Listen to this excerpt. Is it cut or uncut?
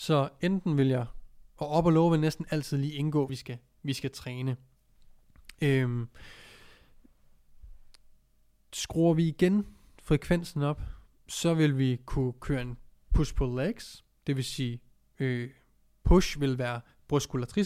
cut